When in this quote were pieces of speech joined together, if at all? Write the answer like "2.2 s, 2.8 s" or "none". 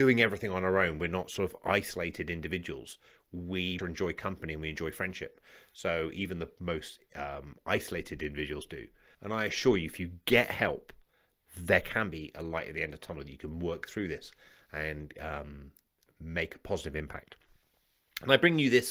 3.8 s, 9.1 s